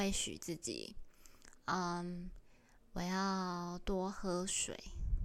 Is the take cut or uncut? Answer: uncut